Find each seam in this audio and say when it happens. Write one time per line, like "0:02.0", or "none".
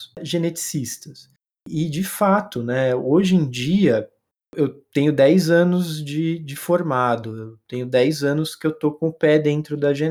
0:01.5